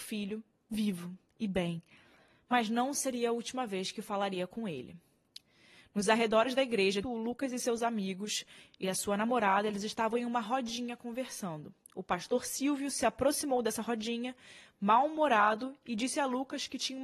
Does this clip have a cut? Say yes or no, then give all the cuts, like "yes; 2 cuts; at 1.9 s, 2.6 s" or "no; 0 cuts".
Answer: yes; 1 cut; at 7.0 s